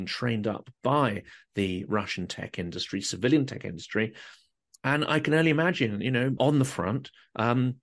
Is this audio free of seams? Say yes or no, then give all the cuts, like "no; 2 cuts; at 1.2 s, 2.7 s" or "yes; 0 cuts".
no; 1 cut; at 6.4 s